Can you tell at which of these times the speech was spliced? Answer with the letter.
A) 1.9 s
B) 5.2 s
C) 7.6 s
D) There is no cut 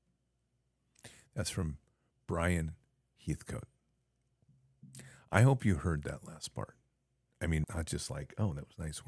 C